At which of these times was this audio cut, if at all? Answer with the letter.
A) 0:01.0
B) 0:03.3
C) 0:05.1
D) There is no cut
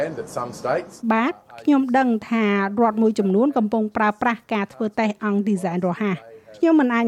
A